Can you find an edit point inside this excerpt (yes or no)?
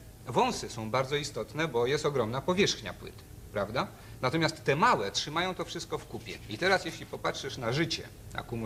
no